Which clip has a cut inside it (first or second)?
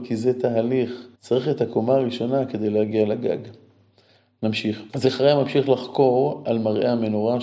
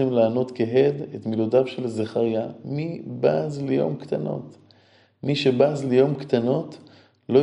first